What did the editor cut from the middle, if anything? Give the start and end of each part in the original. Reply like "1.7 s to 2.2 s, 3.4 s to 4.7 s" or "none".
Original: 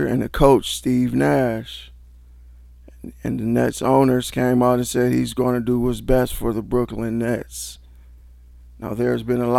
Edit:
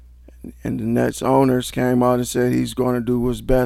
none

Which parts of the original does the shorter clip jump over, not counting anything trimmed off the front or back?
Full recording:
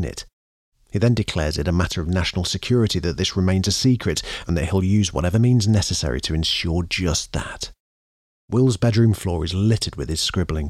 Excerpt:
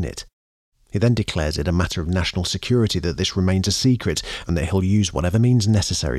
none

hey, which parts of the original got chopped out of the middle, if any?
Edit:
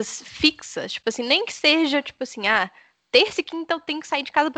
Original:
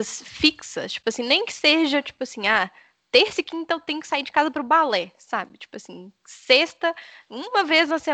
none

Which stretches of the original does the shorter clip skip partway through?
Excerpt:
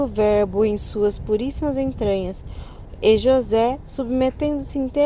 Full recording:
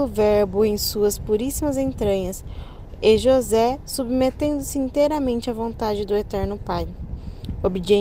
none

